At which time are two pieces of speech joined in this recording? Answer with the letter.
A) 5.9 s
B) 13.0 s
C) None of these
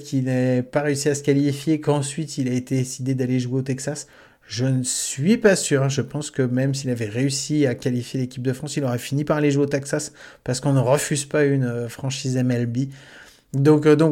C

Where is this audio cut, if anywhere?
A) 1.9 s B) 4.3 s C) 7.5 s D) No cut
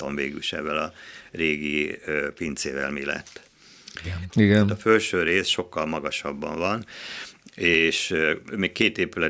B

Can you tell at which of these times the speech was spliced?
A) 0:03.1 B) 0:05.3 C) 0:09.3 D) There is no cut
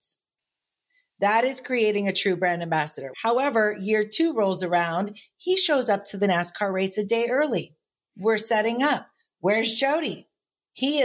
A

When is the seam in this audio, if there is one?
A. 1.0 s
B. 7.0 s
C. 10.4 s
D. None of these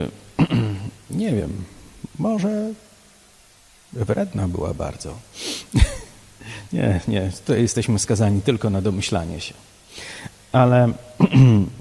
D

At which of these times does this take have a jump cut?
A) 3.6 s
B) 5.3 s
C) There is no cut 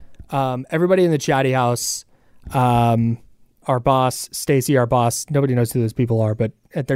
A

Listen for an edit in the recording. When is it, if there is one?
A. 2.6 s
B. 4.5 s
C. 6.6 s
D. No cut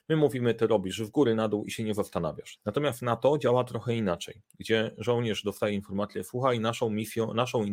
A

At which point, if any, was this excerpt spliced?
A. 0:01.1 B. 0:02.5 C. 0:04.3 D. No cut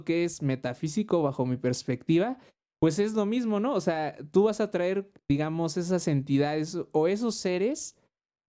D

